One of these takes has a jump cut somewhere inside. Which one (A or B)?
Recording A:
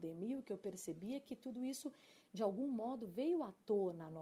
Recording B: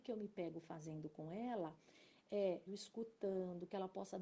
B